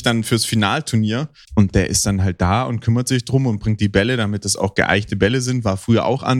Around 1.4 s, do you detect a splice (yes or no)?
yes